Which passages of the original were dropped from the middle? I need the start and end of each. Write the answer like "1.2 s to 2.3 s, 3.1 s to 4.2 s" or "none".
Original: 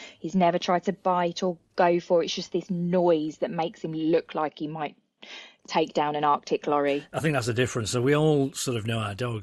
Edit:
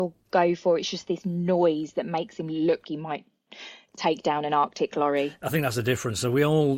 4.3 s to 4.5 s